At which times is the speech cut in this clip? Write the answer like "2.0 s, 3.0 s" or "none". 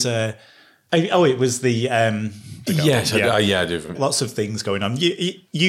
2.7 s, 3.9 s